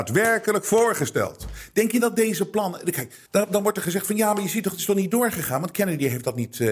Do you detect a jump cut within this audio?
yes; 1 cut; at 3.3 s

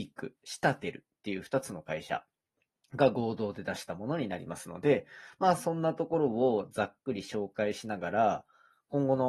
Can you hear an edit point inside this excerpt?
no; 0 cuts

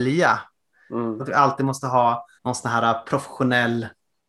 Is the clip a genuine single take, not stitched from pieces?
no; 2 cuts; at 1.2 s, 2.4 s

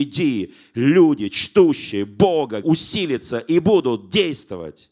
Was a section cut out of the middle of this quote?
yes; 1 cut; at 2.6 s

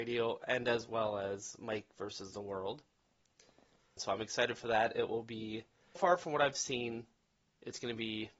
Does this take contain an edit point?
yes; 2 cuts; at 4.0 s, 6.0 s

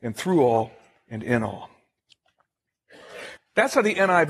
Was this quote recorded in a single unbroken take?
no; 1 cut; at 3.4 s

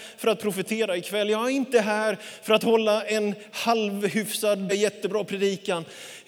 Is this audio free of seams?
no; 1 cut; at 4.7 s

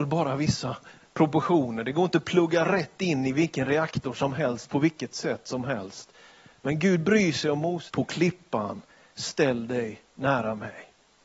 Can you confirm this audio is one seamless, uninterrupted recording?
no; 1 cut; at 7.9 s

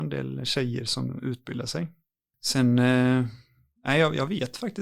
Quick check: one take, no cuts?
yes; 0 cuts

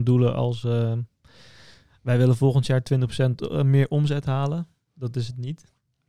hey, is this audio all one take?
yes; 0 cuts

